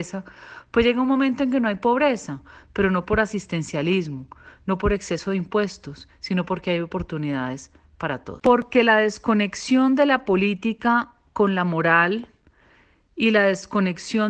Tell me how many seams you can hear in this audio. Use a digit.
0